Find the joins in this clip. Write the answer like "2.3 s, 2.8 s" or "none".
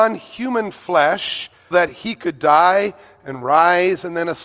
1.7 s